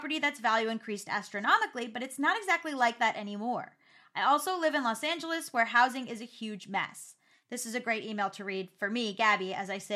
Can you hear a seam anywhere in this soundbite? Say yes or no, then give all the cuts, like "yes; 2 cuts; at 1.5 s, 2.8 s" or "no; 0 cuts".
yes; 1 cut; at 7.3 s